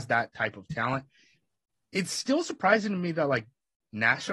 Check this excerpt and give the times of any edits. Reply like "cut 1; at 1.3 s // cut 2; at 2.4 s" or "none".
none